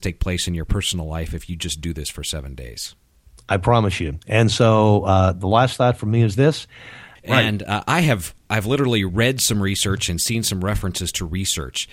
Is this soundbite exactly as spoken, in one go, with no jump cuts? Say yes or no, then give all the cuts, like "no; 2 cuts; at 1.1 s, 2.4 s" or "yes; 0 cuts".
no; 1 cut; at 7.2 s